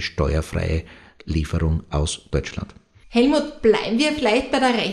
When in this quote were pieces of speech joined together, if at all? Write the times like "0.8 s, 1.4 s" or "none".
none